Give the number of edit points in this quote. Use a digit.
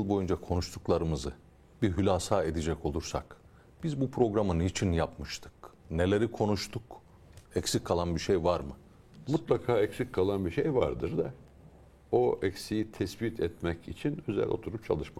2